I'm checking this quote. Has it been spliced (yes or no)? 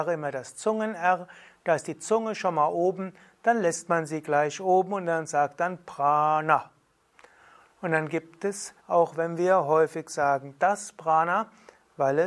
yes